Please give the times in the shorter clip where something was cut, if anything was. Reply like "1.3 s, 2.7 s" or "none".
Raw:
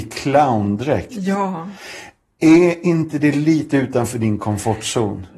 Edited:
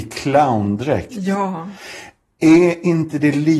none